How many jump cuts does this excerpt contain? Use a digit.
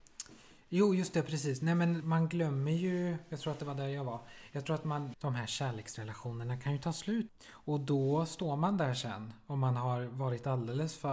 3